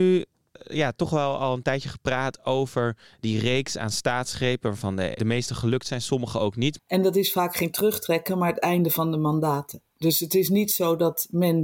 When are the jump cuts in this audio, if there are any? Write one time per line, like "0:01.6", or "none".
0:05.2
0:06.8